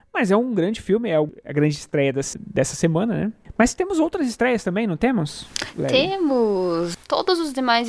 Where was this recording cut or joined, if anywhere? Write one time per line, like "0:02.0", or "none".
0:02.3
0:06.9